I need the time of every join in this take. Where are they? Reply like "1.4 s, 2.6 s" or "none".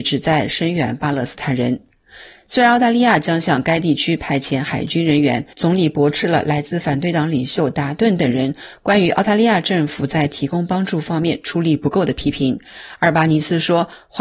none